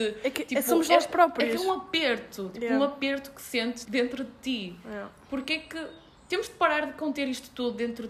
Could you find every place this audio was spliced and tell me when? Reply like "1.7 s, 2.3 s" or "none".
3.9 s